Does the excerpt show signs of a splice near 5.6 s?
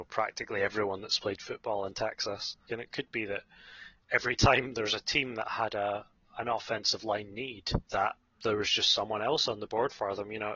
no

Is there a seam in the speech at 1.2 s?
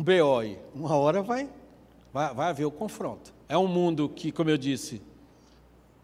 no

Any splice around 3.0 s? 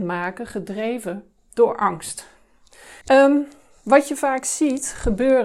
yes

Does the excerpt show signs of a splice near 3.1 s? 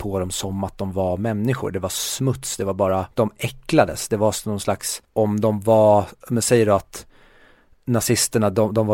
yes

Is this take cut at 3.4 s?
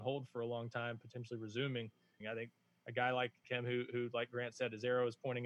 yes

